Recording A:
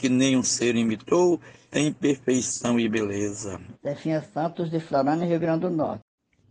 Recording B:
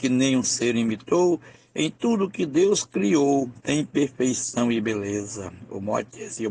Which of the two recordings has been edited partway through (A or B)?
A